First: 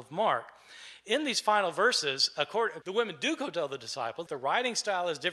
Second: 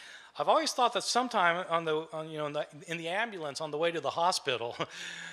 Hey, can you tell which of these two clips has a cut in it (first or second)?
first